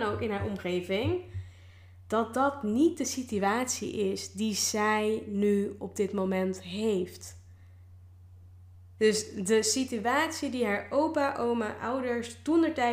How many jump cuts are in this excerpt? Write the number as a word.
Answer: one